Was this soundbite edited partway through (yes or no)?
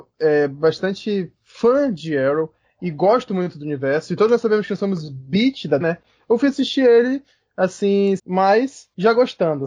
yes